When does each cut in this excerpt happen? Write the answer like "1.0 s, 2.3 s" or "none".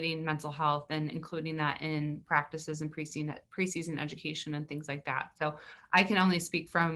none